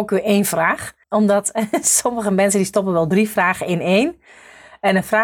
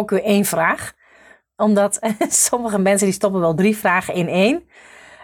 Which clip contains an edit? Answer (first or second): first